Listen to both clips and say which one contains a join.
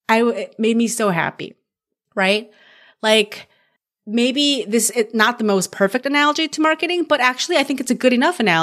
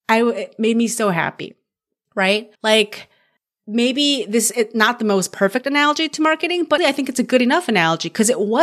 second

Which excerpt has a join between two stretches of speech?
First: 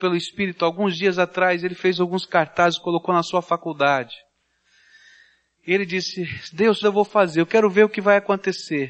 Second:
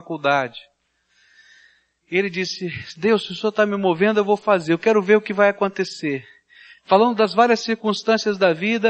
first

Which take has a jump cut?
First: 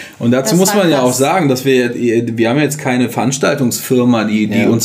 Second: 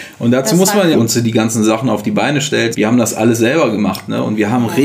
second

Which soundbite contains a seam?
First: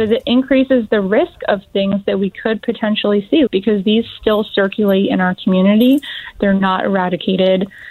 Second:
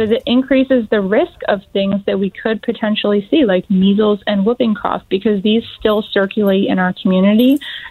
first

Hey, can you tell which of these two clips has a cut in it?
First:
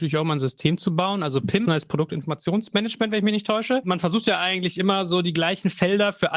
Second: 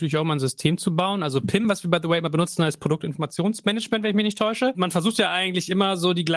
first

